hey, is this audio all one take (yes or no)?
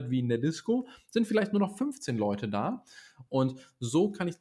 no